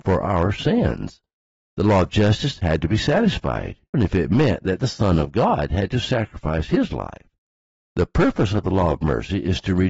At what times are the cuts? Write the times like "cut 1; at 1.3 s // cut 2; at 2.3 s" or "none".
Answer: cut 1; at 3.9 s